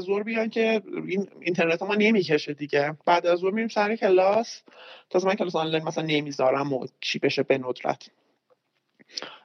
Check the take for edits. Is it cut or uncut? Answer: cut